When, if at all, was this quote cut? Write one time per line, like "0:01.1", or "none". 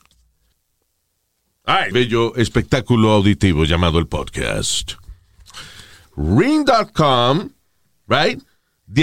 0:01.9
0:06.0